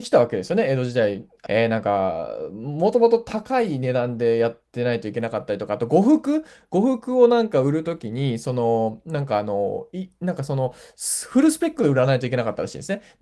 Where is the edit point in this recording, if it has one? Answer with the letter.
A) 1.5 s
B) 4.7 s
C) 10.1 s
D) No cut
A